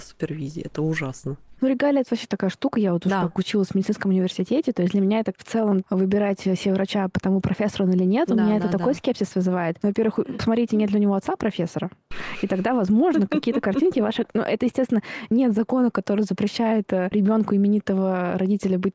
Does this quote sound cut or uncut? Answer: uncut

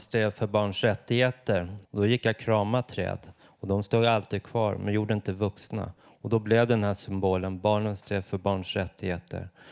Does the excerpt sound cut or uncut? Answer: cut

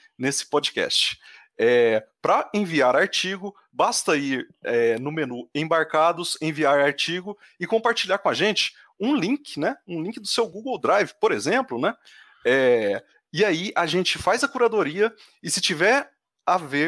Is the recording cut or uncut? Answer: uncut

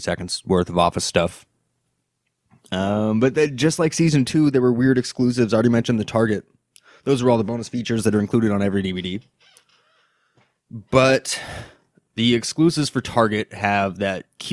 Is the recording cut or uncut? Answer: uncut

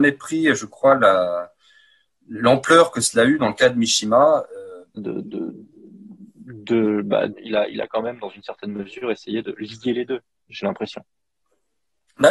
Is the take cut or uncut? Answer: cut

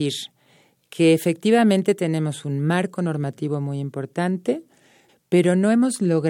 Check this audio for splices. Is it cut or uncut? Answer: cut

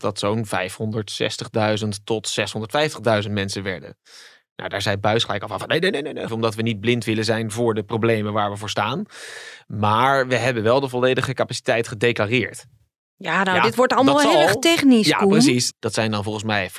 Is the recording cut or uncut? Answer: cut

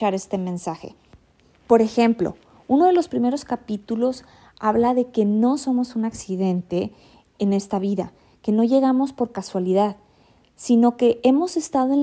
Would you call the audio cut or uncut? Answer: uncut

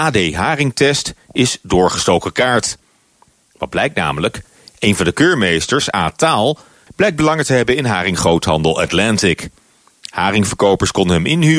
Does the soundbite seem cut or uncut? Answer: cut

